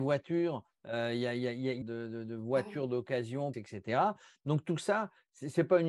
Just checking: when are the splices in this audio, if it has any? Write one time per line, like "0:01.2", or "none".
0:01.8
0:03.5